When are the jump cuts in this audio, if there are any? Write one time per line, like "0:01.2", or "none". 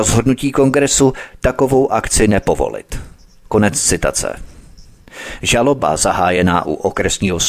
none